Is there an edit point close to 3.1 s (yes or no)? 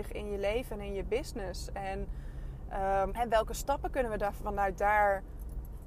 yes